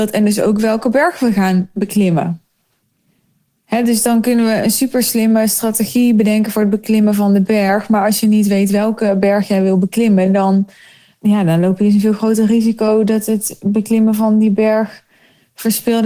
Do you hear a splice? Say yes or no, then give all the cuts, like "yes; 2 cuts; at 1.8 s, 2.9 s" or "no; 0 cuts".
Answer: no; 0 cuts